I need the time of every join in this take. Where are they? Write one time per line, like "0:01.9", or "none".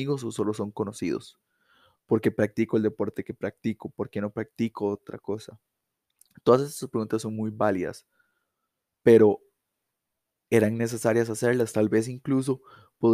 none